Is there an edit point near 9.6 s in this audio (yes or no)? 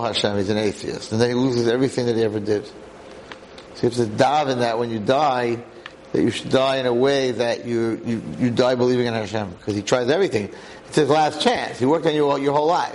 no